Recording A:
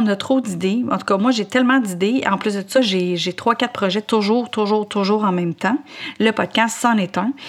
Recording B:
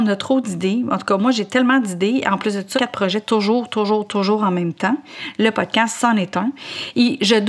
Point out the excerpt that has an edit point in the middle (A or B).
B